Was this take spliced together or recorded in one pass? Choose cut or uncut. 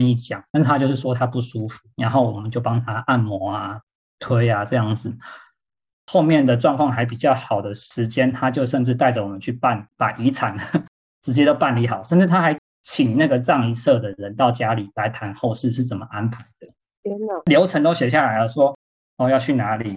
uncut